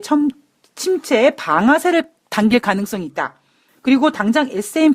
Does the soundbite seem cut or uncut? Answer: cut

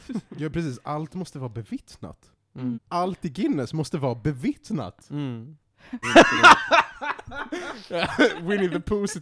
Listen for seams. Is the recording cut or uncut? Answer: cut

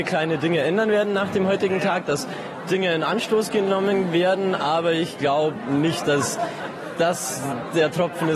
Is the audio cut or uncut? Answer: uncut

